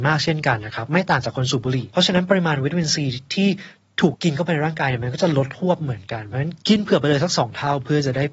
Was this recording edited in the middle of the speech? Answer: yes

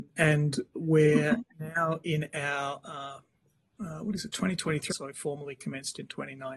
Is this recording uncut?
no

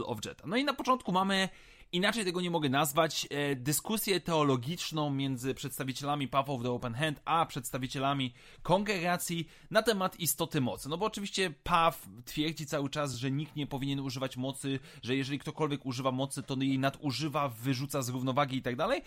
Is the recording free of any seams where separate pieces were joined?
yes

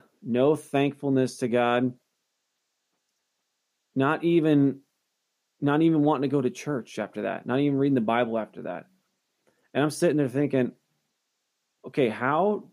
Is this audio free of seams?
yes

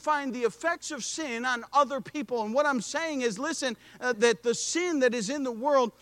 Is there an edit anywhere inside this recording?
yes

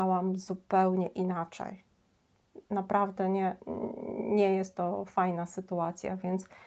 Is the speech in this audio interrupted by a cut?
no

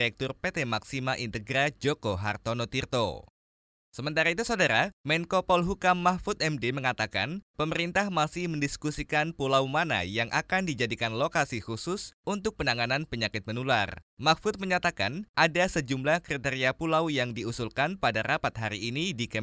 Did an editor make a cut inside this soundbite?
no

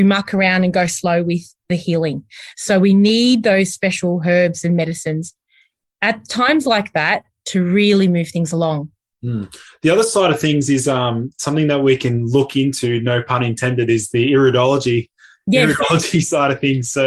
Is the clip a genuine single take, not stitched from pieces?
yes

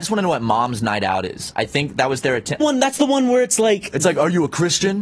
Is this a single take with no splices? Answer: no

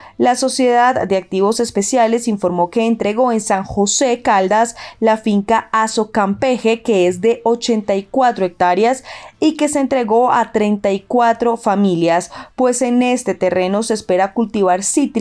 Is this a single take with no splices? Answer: yes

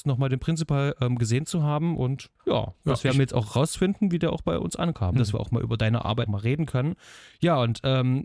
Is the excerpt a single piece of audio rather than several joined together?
no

